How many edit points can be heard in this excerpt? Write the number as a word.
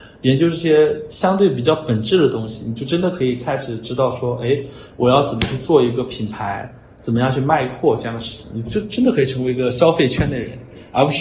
zero